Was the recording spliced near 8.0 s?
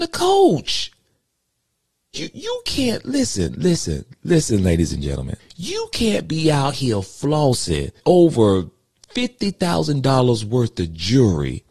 yes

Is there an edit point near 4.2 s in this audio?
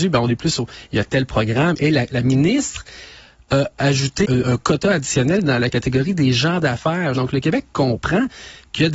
yes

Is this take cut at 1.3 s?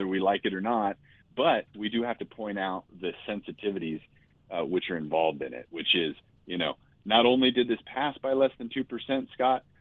no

